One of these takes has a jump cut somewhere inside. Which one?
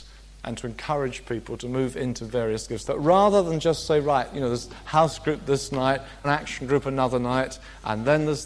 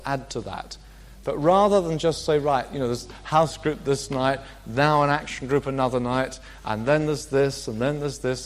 first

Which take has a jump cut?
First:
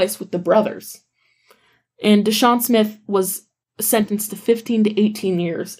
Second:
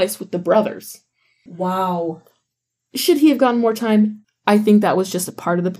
second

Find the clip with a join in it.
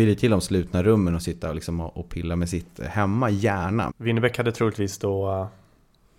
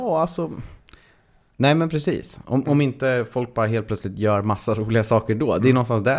first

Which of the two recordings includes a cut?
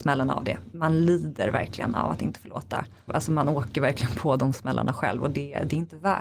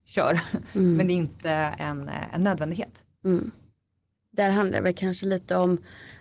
first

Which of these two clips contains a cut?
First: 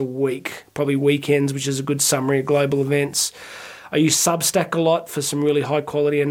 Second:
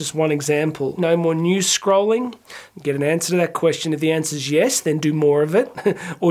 second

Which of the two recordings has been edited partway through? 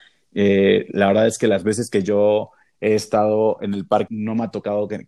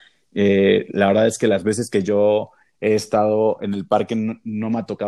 first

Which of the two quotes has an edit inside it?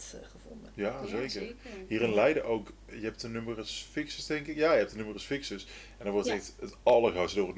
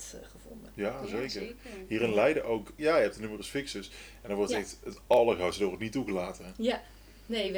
second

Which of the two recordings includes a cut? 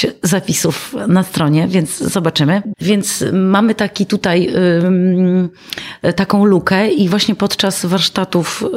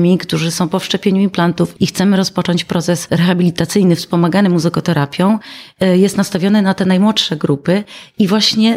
first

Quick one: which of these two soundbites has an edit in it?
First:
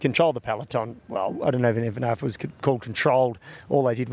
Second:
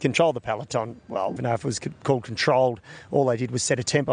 second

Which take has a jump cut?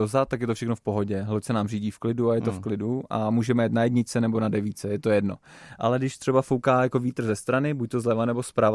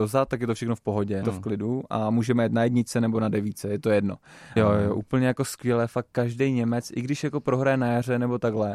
second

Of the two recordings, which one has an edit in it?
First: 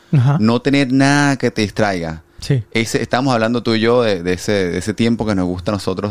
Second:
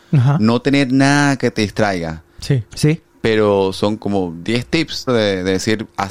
second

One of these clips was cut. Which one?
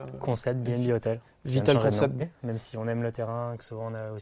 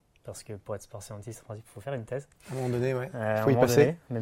first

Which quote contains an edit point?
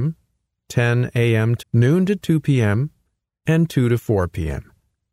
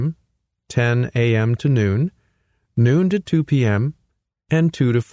first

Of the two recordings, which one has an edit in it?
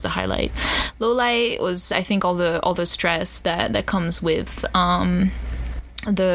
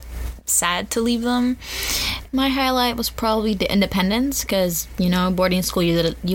second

